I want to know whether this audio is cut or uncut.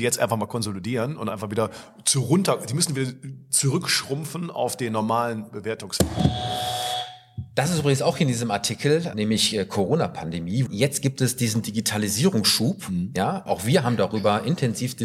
cut